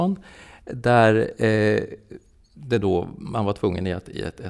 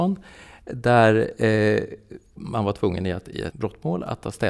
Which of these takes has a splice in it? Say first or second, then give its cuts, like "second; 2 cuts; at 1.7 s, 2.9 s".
second; 2 cuts; at 2.4 s, 3.5 s